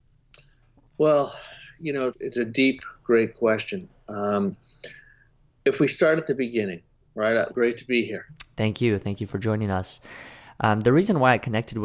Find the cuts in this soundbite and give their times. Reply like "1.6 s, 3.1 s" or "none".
2.1 s, 7.5 s